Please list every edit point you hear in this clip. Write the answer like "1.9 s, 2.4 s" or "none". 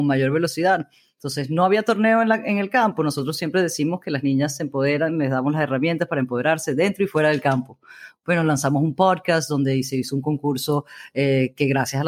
none